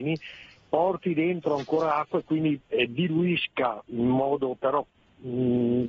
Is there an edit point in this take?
no; 0 cuts

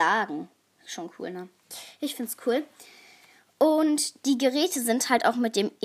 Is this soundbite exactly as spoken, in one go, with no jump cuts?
yes; 0 cuts

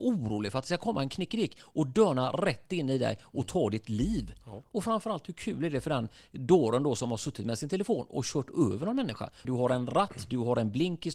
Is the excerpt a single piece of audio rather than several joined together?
no; 1 cut; at 9.4 s

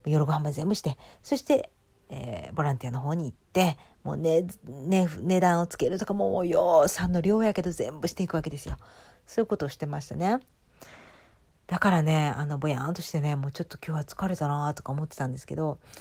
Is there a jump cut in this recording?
no; 0 cuts

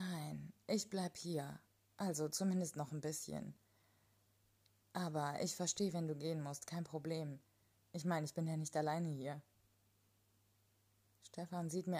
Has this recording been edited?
no; 0 cuts

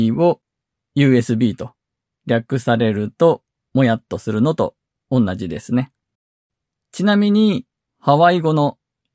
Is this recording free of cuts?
no; 1 cut; at 7.9 s

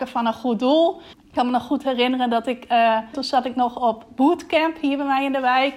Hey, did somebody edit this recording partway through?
yes; 2 cuts; at 1.1 s, 3.1 s

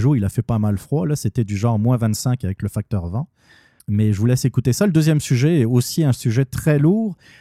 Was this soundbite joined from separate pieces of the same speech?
yes; 1 cut; at 3.8 s

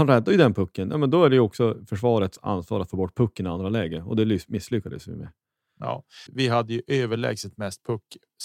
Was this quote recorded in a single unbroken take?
no; 1 cut; at 6.3 s

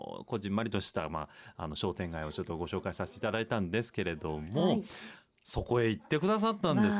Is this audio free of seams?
yes; 0 cuts

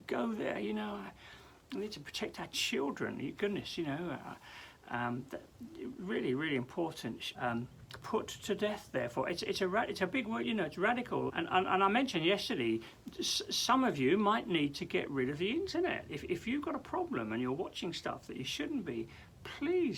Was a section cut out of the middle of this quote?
yes; 2 cuts; at 7.3 s, 11.3 s

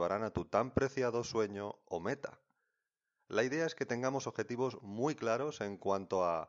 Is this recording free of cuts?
yes; 0 cuts

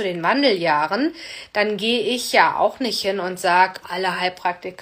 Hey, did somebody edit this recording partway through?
yes; 1 cut; at 3.8 s

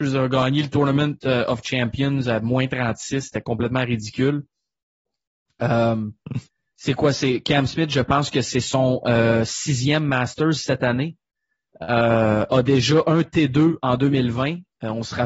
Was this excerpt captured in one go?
yes; 0 cuts

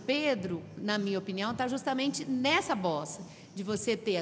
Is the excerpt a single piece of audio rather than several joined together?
yes; 0 cuts

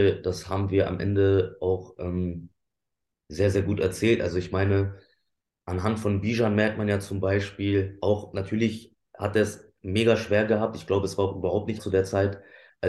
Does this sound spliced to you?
yes; 1 cut; at 11.8 s

